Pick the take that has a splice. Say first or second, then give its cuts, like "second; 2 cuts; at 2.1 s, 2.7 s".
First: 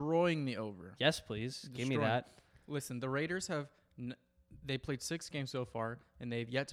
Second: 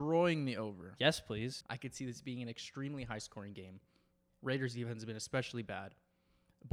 second; 2 cuts; at 1.6 s, 4.3 s